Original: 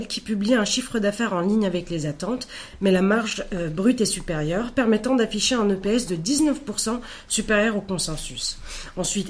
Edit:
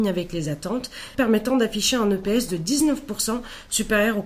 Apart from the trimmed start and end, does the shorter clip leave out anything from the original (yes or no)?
yes